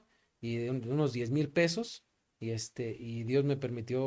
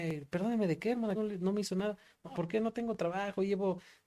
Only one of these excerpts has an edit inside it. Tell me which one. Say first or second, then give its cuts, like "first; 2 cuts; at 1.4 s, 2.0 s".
second; 2 cuts; at 1.1 s, 2.3 s